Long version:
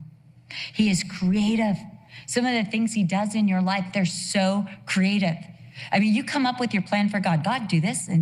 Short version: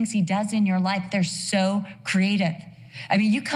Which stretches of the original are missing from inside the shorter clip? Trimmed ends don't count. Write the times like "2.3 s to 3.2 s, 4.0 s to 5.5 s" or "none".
none